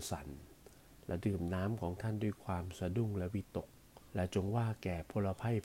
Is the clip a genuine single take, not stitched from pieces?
no; 1 cut; at 4.1 s

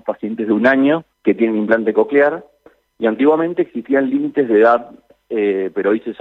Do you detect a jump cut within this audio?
yes; 1 cut; at 1.1 s

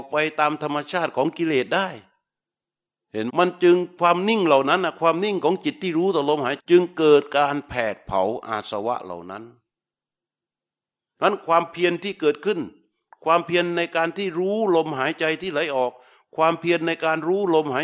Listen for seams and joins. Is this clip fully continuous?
no; 2 cuts; at 3.3 s, 6.6 s

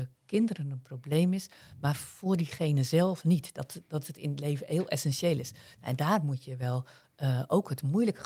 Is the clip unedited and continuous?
yes; 0 cuts

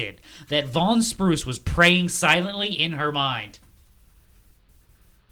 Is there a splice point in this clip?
no; 0 cuts

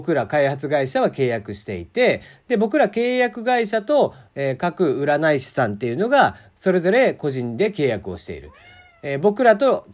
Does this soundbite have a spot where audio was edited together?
no; 0 cuts

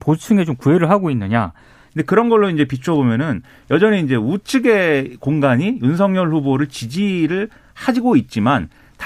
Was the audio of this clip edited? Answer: yes; 1 cut; at 1.9 s

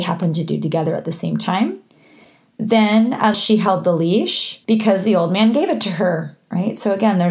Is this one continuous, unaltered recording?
no; 2 cuts; at 3.3 s, 4.6 s

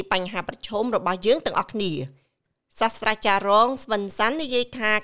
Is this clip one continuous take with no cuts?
yes; 0 cuts

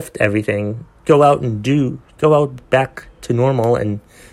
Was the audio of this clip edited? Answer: no; 0 cuts

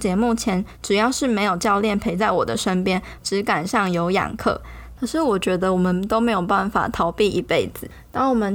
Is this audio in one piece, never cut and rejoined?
no; 2 cuts; at 3.2 s, 5.0 s

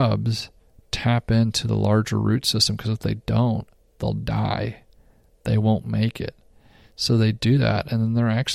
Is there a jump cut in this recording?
no; 0 cuts

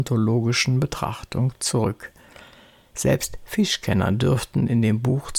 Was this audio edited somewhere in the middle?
no; 0 cuts

